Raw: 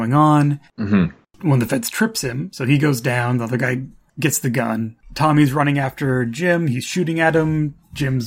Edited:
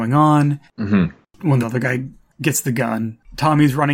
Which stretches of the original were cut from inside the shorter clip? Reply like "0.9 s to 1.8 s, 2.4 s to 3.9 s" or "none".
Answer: 1.6 s to 3.4 s